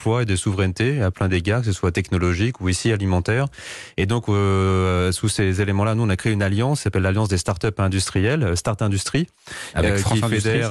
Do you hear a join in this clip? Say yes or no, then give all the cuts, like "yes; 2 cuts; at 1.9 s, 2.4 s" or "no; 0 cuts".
no; 0 cuts